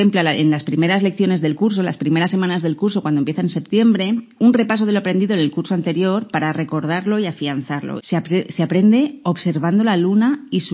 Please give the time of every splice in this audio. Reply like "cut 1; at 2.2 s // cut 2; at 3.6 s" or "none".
cut 1; at 8.0 s